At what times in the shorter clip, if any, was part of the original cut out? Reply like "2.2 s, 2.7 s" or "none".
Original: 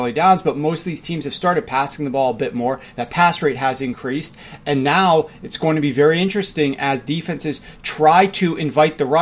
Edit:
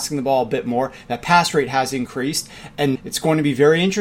2.9 s

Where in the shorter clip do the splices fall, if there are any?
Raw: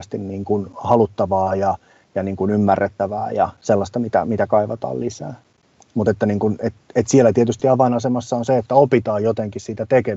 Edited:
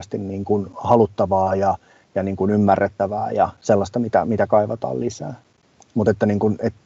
none

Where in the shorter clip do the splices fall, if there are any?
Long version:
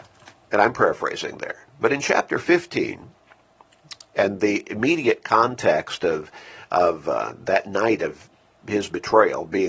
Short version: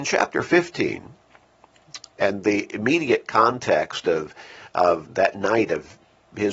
5.1 s

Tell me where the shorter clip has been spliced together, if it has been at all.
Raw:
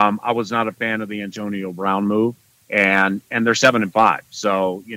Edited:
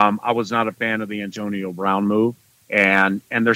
none

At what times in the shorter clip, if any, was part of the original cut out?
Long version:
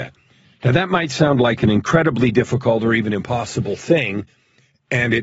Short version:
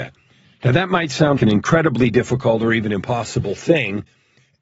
1.4 s

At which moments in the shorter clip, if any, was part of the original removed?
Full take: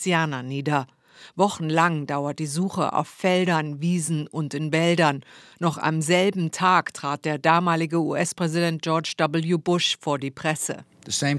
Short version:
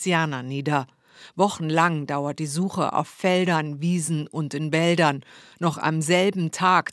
none

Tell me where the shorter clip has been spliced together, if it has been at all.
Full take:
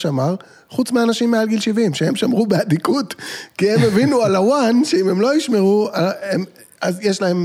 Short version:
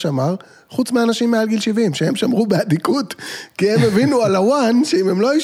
none

